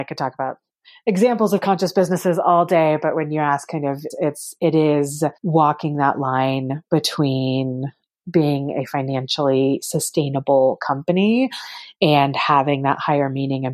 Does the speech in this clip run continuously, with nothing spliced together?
no; 2 cuts; at 4.1 s, 5.4 s

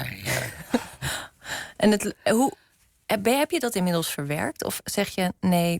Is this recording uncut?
yes; 0 cuts

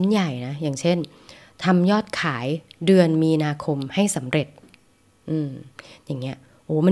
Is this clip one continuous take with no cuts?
yes; 0 cuts

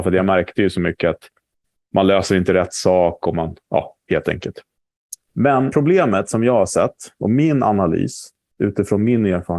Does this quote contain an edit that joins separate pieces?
yes; 2 cuts; at 4.1 s, 5.7 s

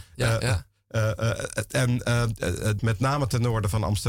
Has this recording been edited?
yes; 1 cut; at 2.8 s

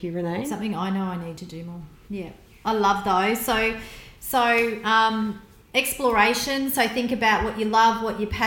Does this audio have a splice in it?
yes; 1 cut; at 2.1 s

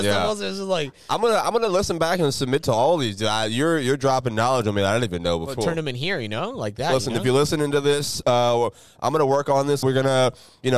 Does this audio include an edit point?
yes; 2 cuts; at 5.6 s, 9.8 s

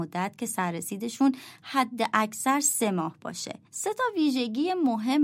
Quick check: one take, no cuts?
no; 1 cut; at 3.7 s

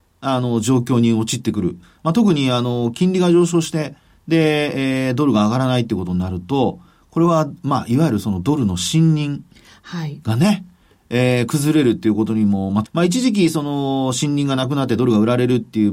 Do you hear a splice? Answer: yes; 1 cut; at 12.8 s

